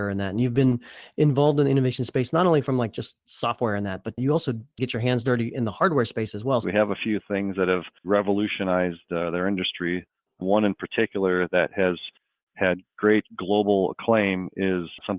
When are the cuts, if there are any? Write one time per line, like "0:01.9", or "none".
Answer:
0:06.6
0:08.0